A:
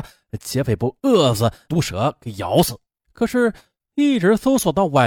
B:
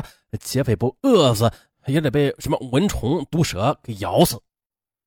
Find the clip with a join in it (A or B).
A